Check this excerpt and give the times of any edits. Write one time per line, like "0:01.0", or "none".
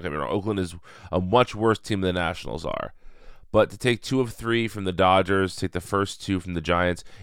none